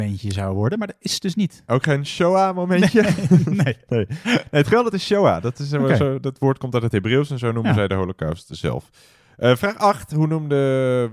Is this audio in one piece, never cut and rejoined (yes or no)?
yes